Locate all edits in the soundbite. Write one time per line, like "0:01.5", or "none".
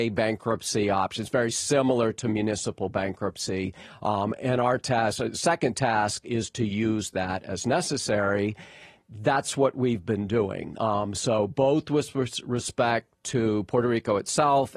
none